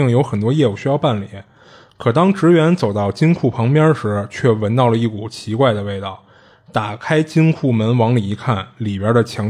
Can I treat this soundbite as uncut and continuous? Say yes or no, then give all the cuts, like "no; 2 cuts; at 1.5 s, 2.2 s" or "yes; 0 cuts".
yes; 0 cuts